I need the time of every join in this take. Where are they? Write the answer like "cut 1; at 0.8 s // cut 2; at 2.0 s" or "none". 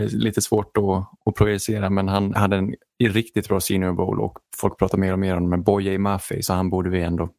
cut 1; at 2.3 s